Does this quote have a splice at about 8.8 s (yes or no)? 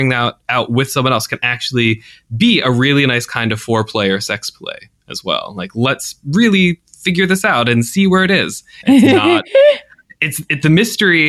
yes